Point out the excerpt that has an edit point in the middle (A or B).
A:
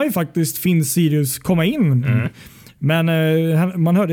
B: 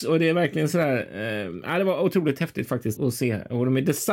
B